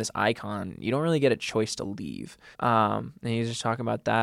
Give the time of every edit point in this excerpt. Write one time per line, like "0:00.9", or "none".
0:02.5